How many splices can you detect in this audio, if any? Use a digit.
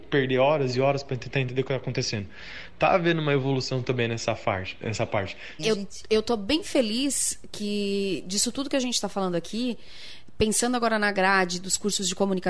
1